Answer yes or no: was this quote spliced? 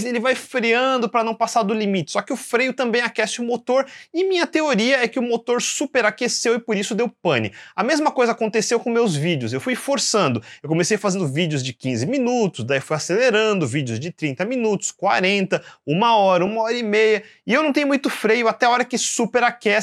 no